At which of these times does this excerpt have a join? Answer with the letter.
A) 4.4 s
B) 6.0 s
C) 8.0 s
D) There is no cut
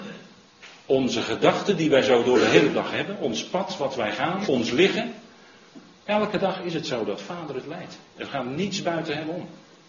A